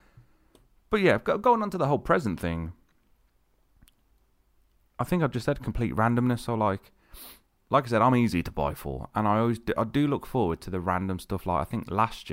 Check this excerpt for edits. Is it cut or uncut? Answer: uncut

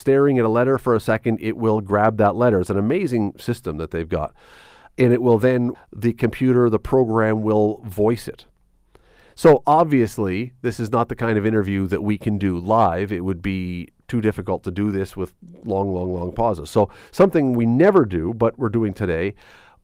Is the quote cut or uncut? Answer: cut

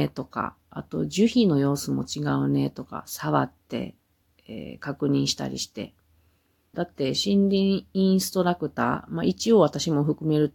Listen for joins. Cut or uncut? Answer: cut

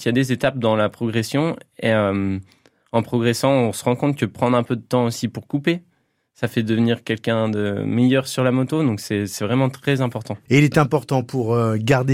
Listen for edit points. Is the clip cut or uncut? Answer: uncut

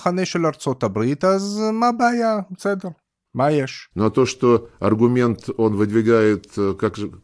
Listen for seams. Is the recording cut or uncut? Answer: cut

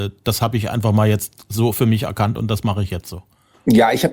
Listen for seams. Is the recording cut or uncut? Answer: uncut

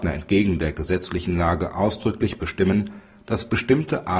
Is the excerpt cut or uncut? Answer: uncut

